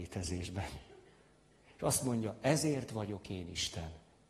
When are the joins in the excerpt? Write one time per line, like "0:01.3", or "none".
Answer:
none